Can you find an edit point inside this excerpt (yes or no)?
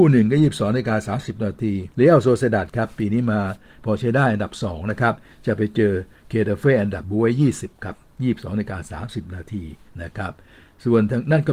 yes